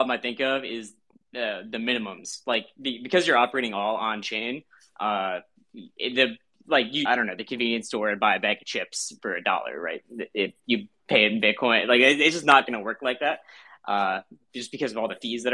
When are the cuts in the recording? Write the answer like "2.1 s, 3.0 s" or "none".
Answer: 7.1 s, 9.2 s